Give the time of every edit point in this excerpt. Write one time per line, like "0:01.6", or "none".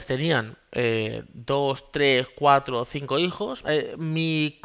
0:03.6